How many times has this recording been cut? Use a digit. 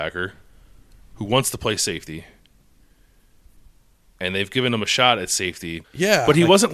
1